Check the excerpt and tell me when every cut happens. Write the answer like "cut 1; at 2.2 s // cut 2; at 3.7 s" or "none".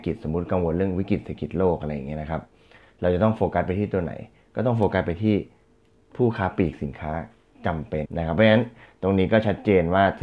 cut 1; at 8.1 s